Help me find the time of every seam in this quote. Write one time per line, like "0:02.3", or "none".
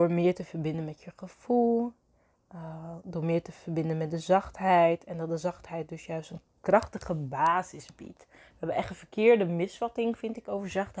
none